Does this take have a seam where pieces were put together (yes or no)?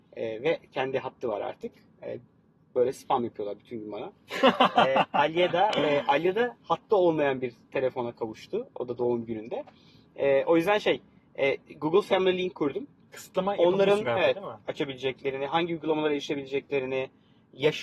yes